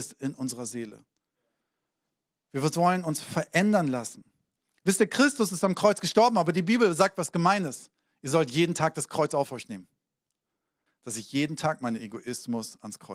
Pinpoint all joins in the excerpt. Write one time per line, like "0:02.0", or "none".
0:10.9

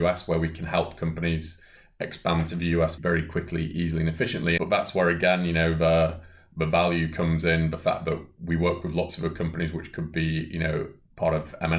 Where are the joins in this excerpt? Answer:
0:03.0
0:04.6

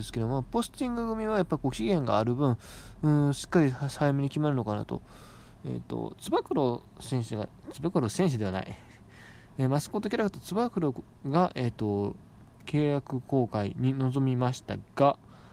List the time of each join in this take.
0:05.6

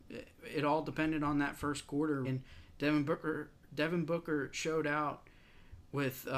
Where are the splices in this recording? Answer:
0:02.2

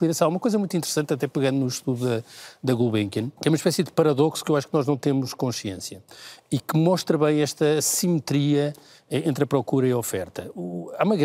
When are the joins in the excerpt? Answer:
0:03.4

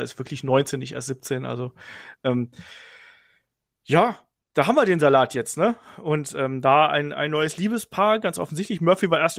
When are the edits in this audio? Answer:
none

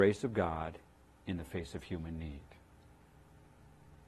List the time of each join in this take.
none

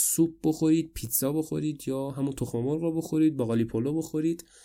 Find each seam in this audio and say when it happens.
none

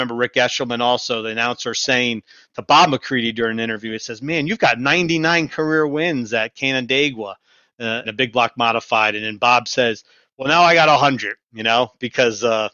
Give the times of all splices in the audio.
0:08.0

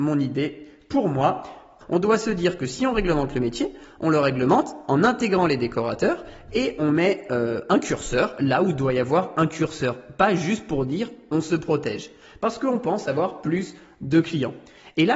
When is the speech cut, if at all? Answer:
0:01.8

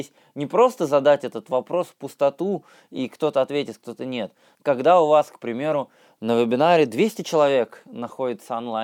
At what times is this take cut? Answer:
0:04.5

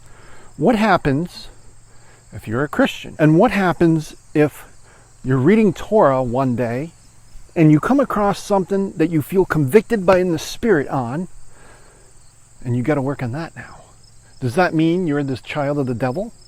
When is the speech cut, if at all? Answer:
0:03.2
0:07.5

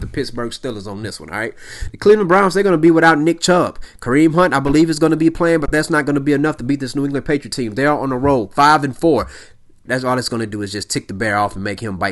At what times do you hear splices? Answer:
0:01.9
0:09.9

